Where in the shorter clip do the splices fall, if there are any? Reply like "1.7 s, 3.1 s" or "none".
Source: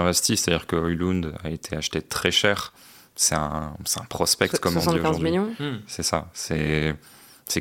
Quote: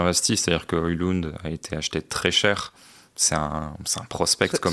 none

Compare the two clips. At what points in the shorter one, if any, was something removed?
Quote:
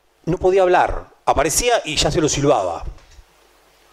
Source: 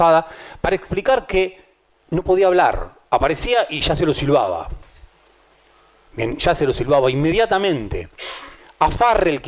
none

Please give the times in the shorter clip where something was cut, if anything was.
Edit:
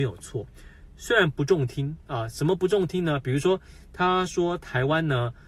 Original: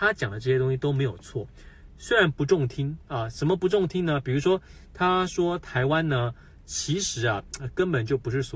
none

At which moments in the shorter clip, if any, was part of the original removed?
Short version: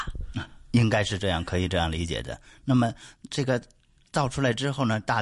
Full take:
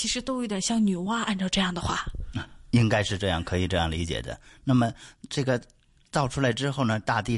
none

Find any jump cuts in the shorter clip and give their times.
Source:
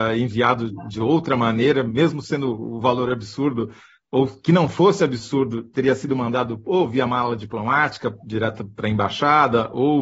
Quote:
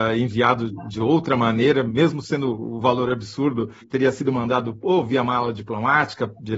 3.8 s

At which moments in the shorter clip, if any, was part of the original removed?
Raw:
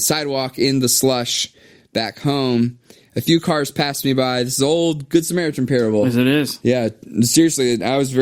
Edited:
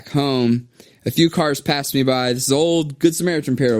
none

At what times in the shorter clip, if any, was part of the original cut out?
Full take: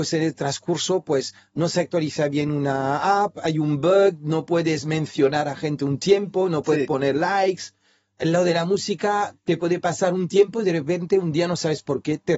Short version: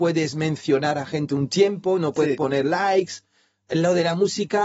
none

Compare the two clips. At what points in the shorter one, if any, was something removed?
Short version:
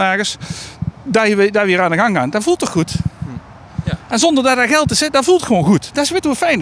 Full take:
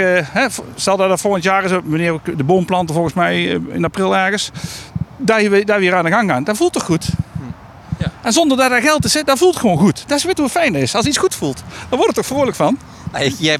none

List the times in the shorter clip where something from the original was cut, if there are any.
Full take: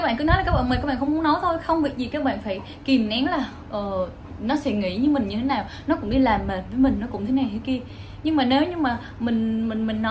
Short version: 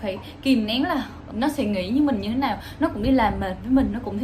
1.3 s

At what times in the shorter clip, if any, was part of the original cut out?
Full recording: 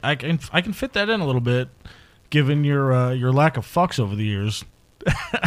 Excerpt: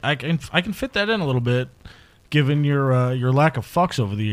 none

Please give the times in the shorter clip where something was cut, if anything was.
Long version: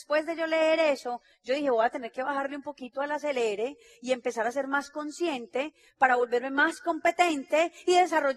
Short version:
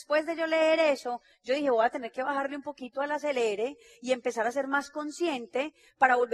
none

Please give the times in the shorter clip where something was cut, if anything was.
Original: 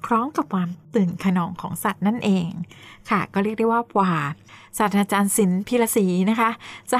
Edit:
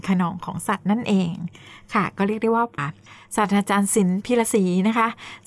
2.8 s

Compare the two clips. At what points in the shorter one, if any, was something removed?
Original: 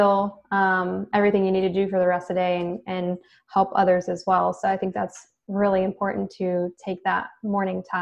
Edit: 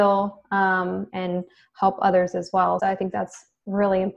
1.1 s, 2.8 s

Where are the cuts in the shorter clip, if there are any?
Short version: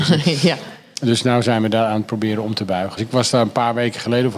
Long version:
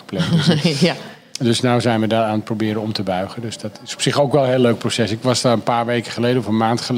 3.0 s

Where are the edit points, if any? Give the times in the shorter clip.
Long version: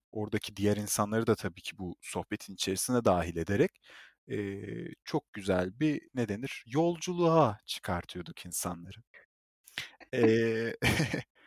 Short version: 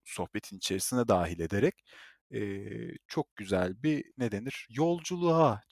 none

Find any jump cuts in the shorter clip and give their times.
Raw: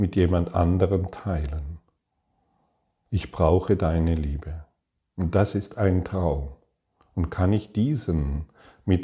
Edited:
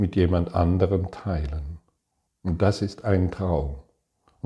2.3 s

